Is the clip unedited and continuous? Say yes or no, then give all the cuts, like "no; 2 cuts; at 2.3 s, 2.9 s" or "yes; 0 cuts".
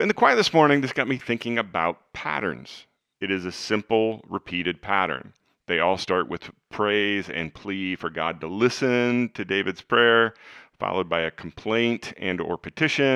no; 1 cut; at 3.1 s